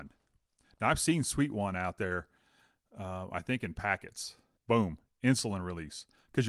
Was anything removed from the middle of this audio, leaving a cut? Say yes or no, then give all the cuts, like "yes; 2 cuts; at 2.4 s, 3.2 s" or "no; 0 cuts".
yes; 1 cut; at 4.6 s